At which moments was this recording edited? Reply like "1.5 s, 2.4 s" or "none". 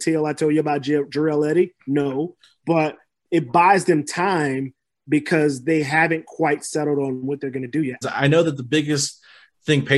8.0 s